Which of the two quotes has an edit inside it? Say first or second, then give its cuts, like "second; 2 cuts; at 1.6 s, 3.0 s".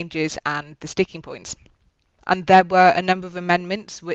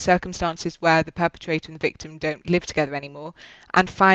first; 1 cut; at 2.2 s